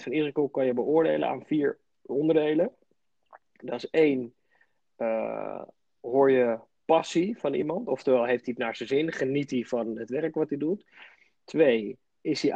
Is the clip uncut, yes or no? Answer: yes